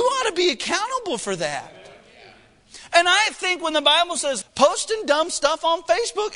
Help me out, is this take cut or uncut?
cut